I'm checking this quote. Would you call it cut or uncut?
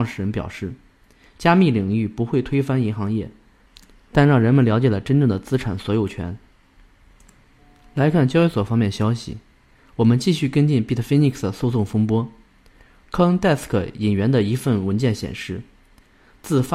uncut